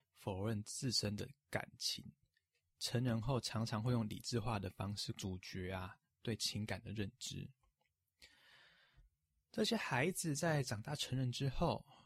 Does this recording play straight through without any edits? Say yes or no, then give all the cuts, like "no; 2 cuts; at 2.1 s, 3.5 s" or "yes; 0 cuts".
yes; 0 cuts